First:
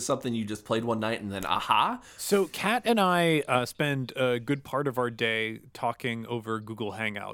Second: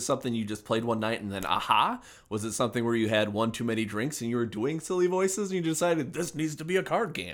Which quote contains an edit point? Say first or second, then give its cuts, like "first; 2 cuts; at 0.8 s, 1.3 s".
first; 1 cut; at 2.2 s